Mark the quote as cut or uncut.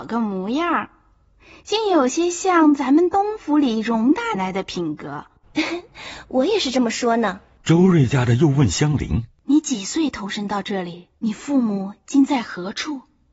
cut